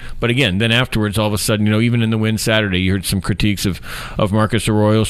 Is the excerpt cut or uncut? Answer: uncut